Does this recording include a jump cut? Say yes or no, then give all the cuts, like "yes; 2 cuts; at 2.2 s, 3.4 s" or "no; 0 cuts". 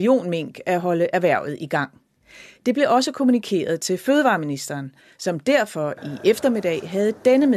no; 0 cuts